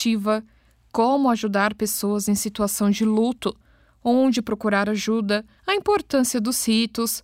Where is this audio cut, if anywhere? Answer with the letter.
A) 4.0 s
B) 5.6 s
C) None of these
B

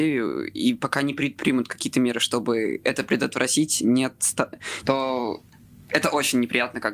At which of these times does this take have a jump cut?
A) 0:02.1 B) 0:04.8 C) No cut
B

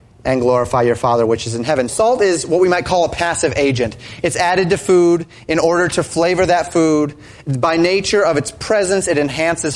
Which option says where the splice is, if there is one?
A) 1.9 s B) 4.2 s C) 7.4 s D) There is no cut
A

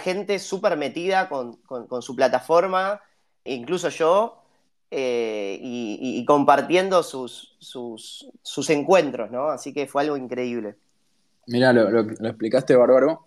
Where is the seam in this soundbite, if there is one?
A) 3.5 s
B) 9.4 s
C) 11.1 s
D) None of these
A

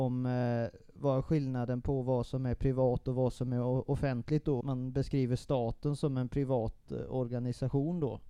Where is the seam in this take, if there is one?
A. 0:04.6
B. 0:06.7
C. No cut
A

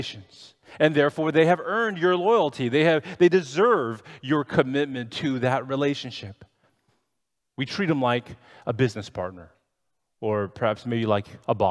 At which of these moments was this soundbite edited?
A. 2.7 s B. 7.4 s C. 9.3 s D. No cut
B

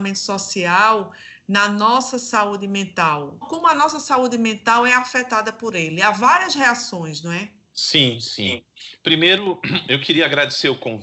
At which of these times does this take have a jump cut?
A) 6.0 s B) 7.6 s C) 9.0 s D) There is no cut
D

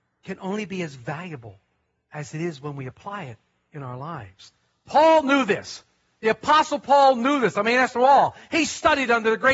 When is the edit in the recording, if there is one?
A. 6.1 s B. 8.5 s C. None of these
C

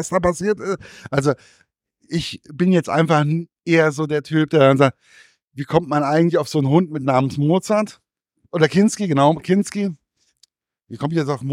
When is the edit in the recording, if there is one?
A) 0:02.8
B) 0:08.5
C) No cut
C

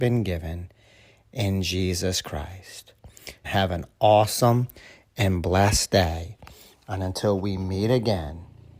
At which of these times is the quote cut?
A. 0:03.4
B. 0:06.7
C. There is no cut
A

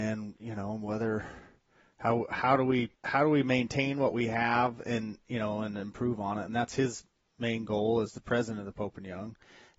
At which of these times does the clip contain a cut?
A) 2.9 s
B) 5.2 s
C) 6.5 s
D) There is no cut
A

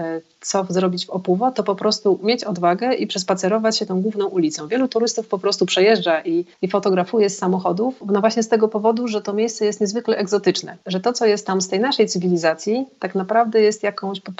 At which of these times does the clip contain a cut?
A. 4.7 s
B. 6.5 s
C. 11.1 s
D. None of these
B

